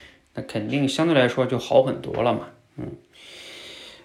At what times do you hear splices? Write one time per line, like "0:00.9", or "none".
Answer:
none